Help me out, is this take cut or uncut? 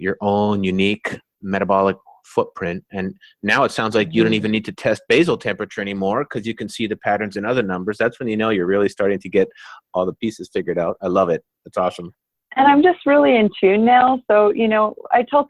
uncut